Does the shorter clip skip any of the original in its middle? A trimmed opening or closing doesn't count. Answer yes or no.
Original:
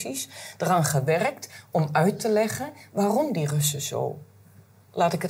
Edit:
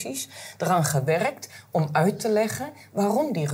no